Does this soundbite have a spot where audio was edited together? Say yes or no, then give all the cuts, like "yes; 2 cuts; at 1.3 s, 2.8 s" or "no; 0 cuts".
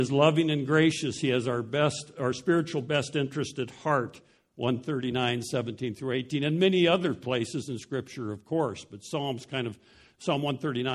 no; 0 cuts